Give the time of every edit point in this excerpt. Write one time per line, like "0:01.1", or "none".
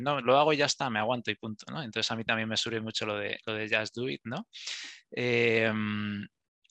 none